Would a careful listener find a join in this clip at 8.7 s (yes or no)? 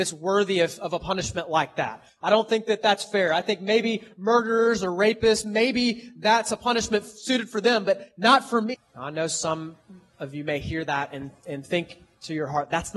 yes